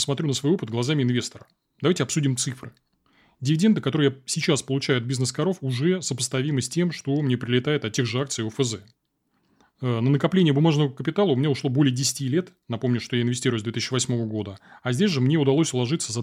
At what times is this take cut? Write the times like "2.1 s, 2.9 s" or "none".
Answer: none